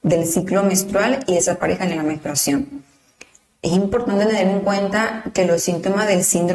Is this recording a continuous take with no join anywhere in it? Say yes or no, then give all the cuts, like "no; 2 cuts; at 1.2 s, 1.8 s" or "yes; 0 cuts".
yes; 0 cuts